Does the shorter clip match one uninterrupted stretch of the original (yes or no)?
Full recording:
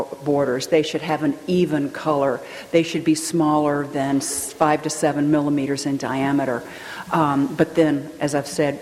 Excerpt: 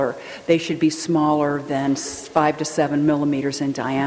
yes